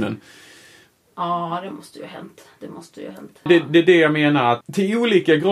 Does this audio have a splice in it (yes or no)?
yes